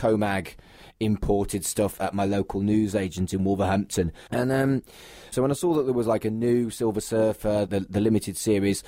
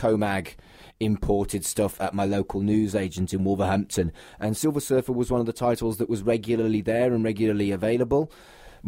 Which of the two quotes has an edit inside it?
first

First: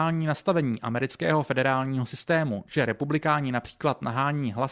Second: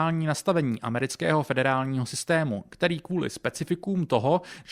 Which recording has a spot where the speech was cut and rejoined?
first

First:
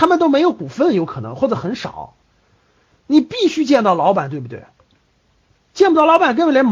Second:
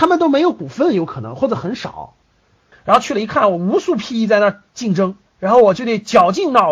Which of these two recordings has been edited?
second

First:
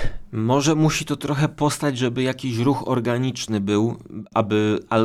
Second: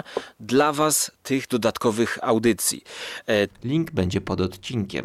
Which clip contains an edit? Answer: second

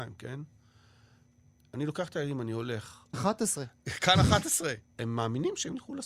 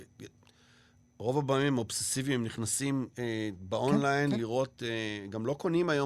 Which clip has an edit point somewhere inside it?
first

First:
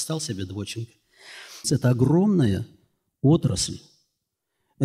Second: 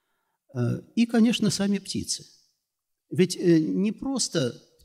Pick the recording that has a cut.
first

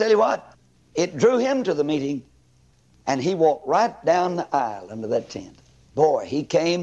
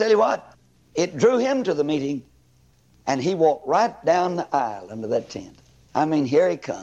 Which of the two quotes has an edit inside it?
first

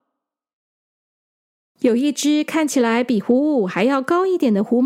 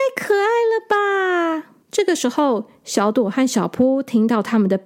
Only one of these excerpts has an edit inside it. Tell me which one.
second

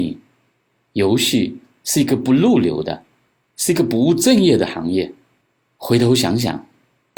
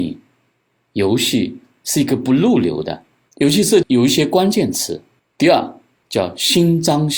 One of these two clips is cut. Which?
second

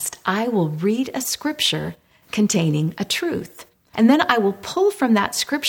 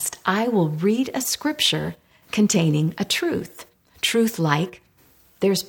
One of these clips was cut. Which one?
first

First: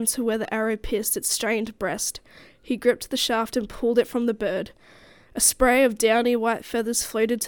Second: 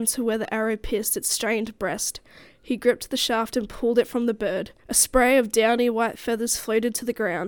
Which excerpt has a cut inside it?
second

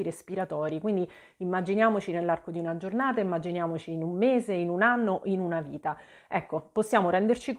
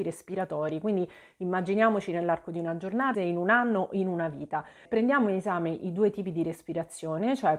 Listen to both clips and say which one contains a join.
second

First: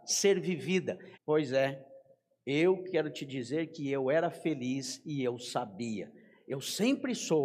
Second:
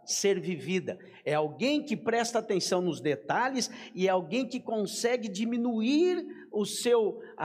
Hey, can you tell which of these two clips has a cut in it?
first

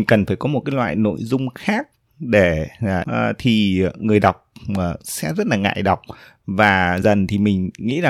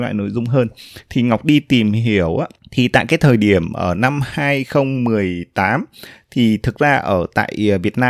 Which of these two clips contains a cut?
first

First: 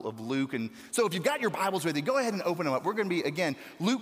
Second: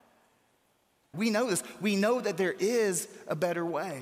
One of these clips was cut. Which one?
second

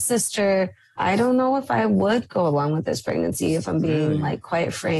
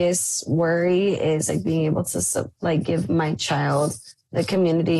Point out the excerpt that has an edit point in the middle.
first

